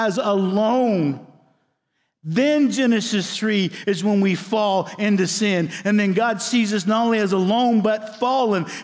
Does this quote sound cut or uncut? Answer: uncut